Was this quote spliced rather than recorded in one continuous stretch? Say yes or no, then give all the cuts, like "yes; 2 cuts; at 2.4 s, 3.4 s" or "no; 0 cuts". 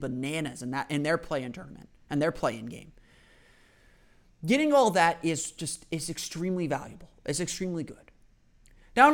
no; 0 cuts